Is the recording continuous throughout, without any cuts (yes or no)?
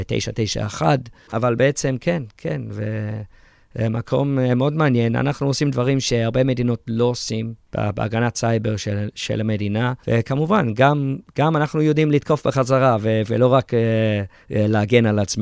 no